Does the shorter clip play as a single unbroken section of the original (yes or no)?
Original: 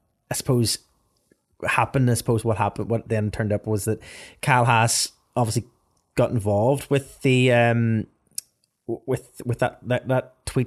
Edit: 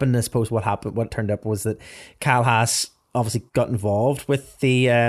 no